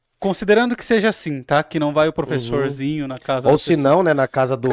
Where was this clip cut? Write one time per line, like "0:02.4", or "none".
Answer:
none